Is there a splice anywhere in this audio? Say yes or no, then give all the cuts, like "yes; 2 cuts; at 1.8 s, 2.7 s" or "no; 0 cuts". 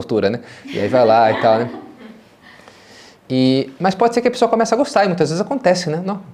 no; 0 cuts